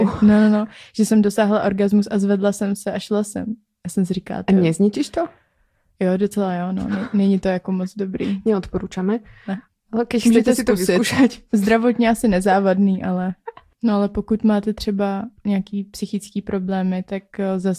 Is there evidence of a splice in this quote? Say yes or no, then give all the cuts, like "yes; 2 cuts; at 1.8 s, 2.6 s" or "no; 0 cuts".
no; 0 cuts